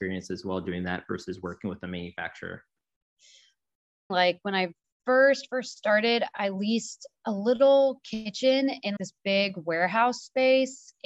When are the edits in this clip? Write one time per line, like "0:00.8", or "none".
0:04.1
0:09.0